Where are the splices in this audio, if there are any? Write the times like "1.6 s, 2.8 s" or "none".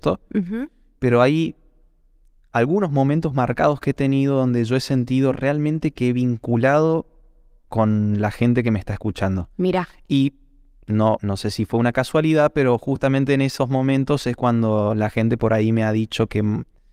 11.2 s